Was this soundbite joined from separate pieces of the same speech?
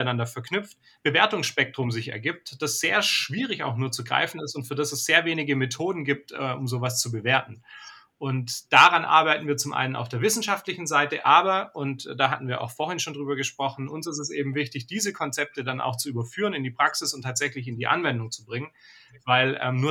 yes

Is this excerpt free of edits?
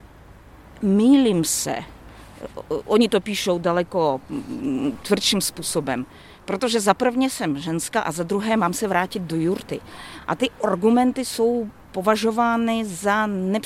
yes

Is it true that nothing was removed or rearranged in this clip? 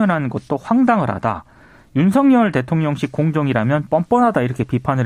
yes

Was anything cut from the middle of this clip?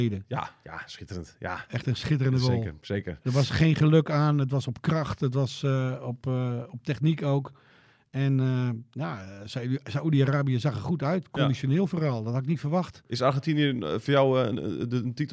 no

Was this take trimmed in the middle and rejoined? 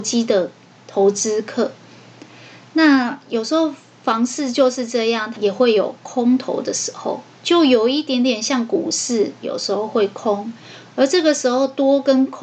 yes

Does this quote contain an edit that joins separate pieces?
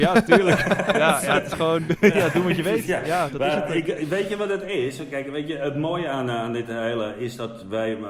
no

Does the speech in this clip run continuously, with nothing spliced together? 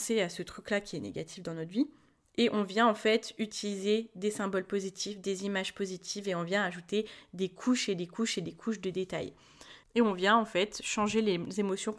no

